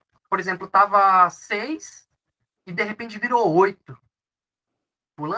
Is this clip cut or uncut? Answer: uncut